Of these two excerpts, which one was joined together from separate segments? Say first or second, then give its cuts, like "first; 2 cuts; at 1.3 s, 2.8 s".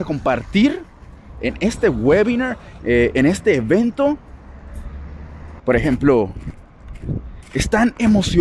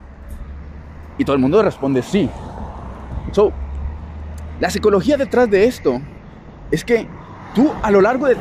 first; 2 cuts; at 2.8 s, 5.6 s